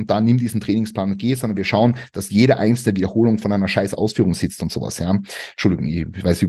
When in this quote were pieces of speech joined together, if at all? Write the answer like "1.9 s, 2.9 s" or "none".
none